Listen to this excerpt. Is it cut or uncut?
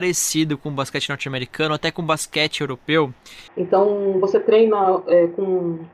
cut